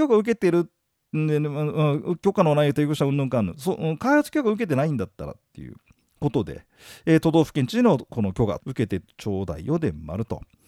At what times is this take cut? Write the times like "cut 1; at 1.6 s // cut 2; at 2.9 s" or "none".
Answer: cut 1; at 8.6 s